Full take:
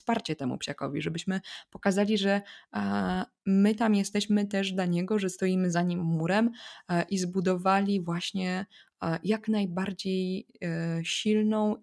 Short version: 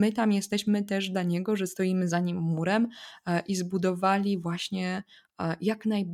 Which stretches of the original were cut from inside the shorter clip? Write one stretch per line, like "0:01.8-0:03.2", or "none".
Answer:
none